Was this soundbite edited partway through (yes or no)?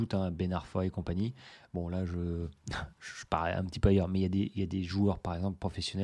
no